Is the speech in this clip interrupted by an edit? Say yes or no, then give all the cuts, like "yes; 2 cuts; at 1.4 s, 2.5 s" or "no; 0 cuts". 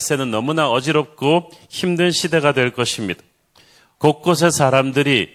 yes; 1 cut; at 4.0 s